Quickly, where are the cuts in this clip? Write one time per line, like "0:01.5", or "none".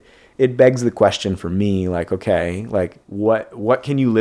0:03.0